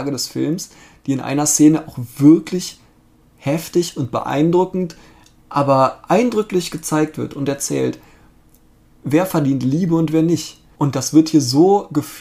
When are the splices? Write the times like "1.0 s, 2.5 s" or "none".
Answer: 10.8 s